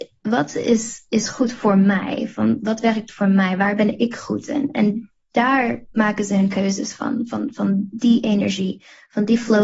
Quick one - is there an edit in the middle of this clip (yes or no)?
no